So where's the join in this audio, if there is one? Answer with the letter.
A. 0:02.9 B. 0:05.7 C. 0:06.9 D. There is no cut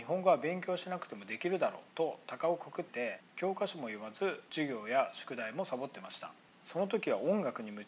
A